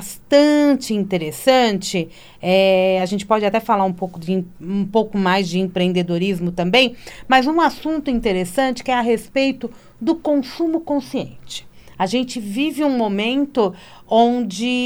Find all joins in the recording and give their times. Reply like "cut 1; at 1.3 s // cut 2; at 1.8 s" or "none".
none